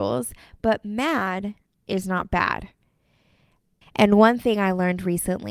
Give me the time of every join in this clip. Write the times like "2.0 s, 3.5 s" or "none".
3.8 s